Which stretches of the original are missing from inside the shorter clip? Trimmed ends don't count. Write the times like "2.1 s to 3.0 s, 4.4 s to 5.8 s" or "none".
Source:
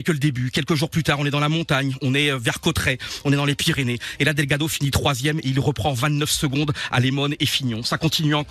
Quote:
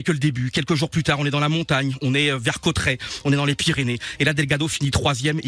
none